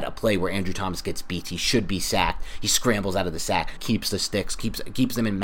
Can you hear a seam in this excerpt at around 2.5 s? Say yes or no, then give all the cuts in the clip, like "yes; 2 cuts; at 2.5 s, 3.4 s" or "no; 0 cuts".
no; 1 cut; at 3.8 s